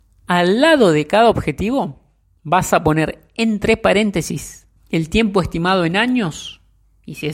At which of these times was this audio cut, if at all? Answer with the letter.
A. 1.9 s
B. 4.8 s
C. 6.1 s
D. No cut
B